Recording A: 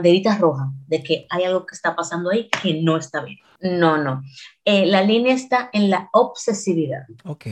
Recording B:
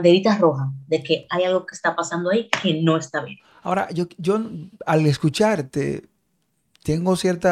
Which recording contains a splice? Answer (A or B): A